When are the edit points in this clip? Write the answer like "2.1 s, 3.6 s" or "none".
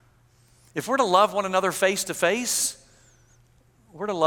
none